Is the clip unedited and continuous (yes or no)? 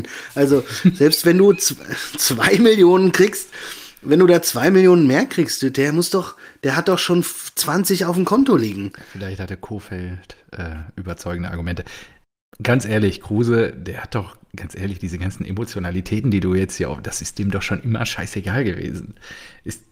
yes